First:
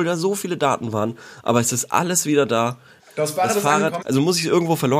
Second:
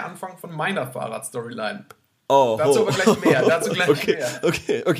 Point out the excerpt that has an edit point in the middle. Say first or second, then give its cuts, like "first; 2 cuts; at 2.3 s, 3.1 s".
first; 2 cuts; at 3.0 s, 4.0 s